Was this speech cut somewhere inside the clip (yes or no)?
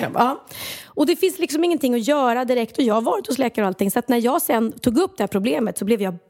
no